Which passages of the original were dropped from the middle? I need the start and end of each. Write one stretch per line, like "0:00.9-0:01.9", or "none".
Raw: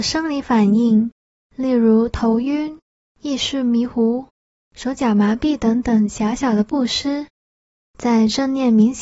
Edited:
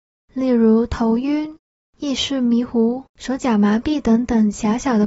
0:04.3-0:04.6